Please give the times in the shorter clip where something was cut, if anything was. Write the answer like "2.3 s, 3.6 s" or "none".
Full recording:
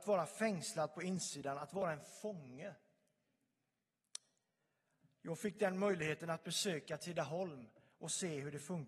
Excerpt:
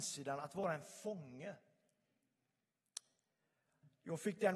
none